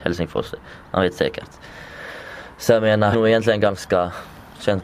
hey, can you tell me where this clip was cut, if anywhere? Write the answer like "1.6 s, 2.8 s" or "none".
none